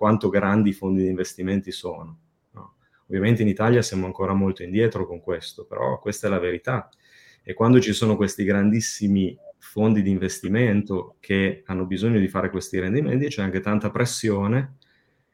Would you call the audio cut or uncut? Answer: uncut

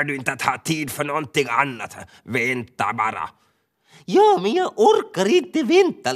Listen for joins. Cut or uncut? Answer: uncut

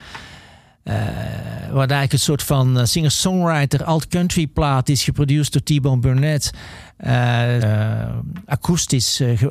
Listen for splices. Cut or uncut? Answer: cut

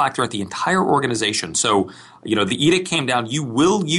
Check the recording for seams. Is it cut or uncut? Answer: uncut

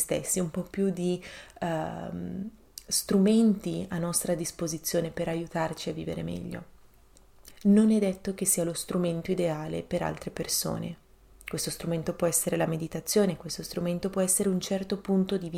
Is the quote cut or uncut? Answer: cut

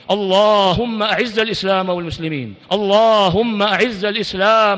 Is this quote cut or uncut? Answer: cut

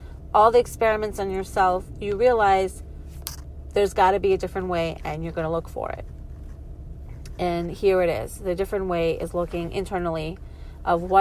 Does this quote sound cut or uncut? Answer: uncut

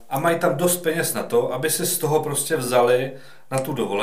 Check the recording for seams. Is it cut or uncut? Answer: uncut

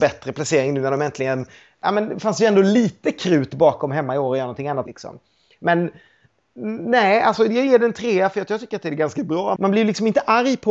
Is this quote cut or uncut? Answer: cut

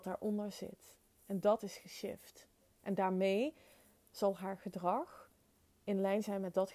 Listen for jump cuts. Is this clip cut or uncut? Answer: uncut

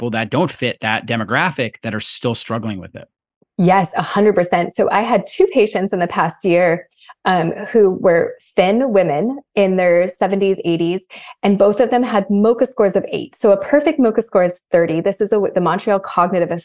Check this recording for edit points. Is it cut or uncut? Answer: uncut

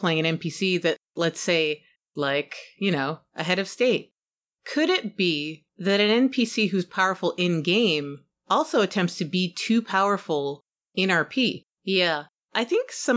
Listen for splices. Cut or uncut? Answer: cut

